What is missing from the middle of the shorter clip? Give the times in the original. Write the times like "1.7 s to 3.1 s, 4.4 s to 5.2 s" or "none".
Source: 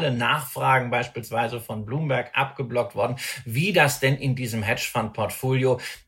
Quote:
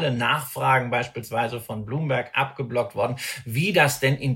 none